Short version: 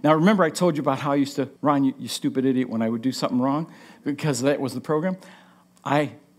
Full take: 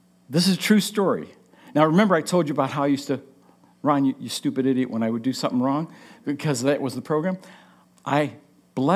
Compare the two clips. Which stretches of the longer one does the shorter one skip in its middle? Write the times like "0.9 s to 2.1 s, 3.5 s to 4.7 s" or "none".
3.3 s to 3.8 s